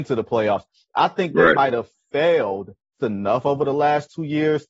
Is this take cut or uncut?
cut